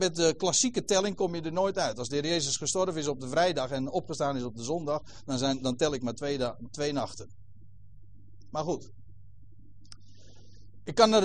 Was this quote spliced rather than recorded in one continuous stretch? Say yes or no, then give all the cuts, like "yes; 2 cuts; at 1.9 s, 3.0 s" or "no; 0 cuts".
no; 0 cuts